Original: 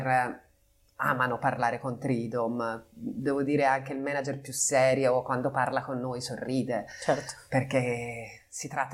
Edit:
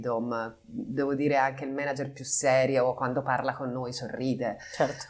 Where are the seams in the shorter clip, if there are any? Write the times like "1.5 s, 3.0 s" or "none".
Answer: none